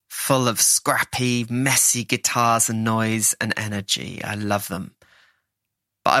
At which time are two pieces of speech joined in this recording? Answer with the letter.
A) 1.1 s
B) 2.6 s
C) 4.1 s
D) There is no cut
D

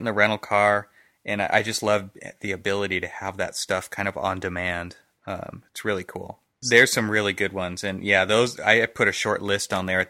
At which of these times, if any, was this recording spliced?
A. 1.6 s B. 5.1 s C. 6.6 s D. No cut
C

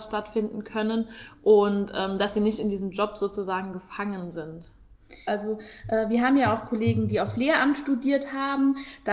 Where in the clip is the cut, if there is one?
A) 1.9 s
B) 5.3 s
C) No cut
B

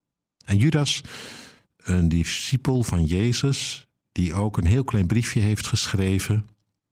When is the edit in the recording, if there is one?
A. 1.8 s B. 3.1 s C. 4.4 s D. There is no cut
D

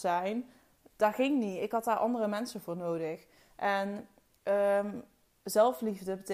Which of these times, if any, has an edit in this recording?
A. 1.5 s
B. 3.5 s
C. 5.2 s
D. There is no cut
D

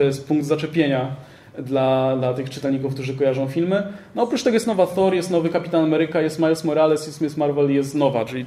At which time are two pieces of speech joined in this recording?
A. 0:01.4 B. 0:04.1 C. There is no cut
C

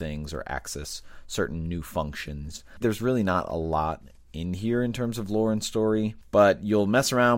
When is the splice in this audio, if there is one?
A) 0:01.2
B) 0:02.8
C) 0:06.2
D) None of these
B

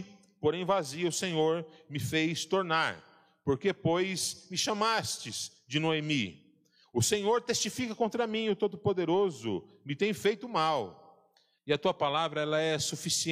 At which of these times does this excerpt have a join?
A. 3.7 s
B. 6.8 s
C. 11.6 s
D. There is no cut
C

